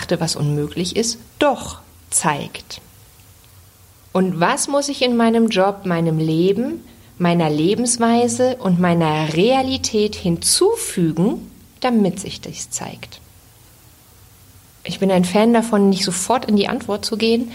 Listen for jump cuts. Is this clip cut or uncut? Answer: cut